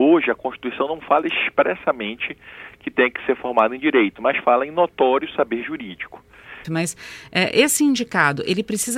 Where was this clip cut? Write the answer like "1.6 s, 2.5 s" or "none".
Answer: 6.6 s